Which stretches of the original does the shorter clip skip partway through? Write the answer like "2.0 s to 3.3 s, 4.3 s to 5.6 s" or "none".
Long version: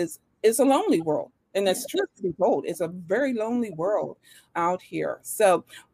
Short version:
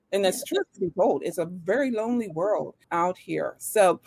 4.3 s to 4.5 s